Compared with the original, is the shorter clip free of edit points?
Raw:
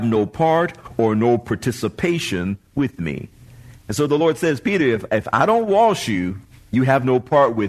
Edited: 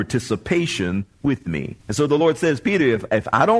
no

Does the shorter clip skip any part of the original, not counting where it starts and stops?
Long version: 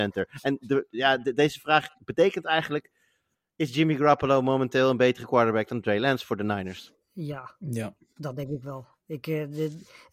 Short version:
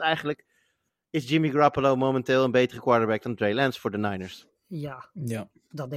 no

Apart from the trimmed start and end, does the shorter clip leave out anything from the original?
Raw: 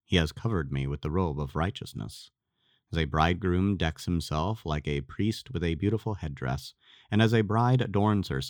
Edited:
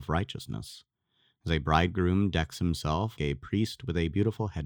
yes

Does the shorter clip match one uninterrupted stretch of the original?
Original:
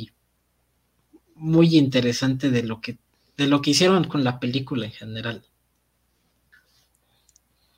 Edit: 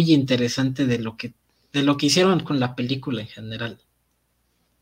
yes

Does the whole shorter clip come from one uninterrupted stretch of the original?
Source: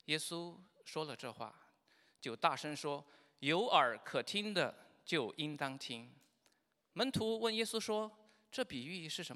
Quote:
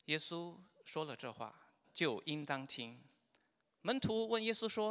no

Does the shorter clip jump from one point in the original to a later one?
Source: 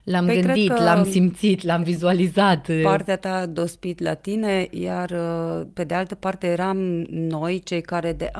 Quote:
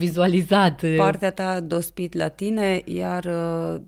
no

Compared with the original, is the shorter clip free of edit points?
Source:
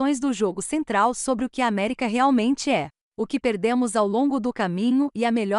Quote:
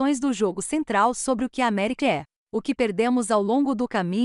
no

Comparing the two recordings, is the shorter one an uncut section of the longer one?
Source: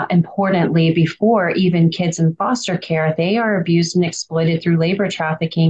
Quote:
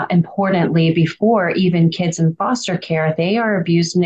yes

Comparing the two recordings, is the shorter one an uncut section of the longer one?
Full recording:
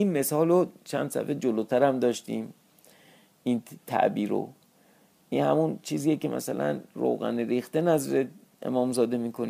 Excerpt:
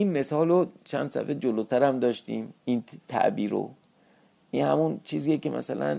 no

